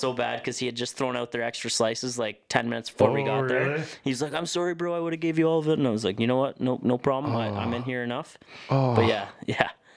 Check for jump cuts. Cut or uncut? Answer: uncut